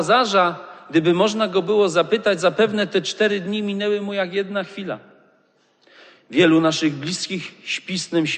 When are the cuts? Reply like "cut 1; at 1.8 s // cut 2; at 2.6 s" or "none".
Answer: none

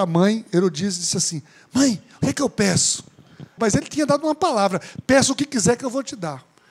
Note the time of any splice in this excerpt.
cut 1; at 3.6 s

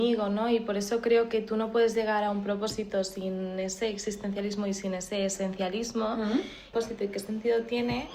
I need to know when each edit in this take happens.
cut 1; at 6.7 s

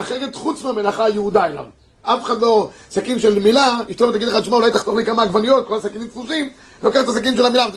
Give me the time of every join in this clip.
cut 1; at 2.0 s

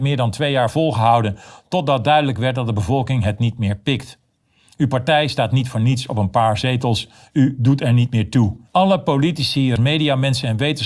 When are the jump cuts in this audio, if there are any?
cut 1; at 8.7 s // cut 2; at 9.8 s

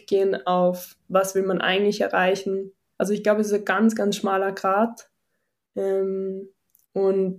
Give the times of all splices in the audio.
cut 1; at 2.9 s

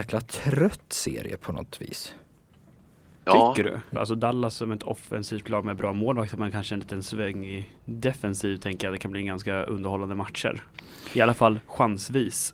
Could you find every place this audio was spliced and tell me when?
cut 1; at 3.9 s // cut 2; at 7.8 s

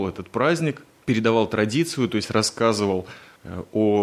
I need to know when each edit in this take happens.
none

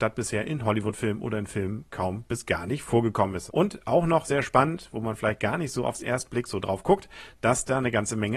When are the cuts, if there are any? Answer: cut 1; at 3.5 s

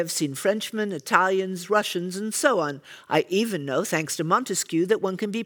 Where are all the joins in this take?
none

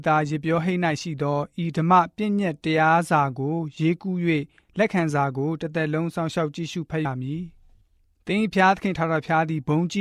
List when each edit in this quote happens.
cut 1; at 7.0 s

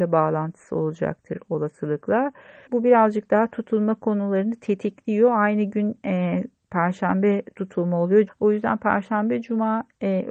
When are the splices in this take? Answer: cut 1; at 2.7 s // cut 2; at 8.3 s

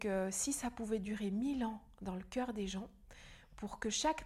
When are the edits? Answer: none

